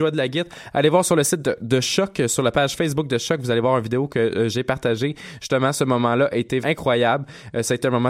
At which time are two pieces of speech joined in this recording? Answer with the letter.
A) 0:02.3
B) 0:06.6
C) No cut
B